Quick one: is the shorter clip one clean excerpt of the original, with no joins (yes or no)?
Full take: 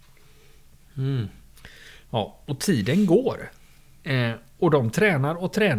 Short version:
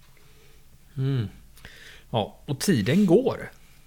yes